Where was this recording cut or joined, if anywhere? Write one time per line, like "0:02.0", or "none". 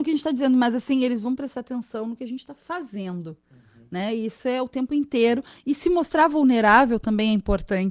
none